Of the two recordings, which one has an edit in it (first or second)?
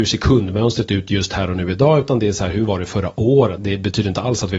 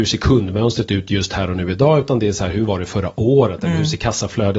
first